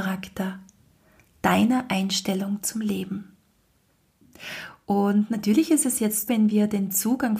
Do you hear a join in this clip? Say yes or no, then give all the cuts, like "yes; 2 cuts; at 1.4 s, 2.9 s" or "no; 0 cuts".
yes; 1 cut; at 6.3 s